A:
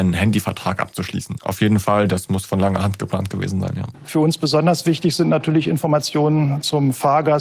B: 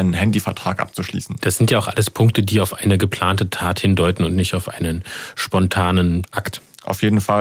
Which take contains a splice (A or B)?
A